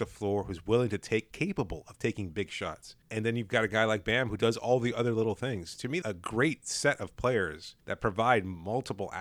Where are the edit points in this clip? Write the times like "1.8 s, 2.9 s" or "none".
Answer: 3.0 s, 6.0 s, 7.8 s